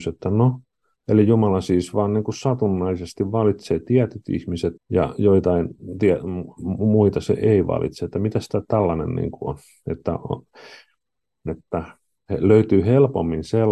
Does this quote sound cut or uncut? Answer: cut